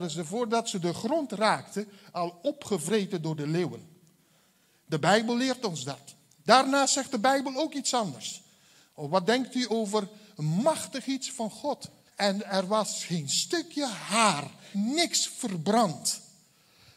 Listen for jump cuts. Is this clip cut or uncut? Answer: cut